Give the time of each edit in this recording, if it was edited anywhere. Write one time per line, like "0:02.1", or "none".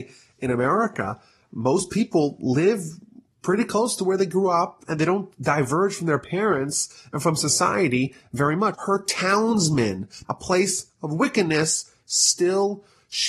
0:08.7
0:10.2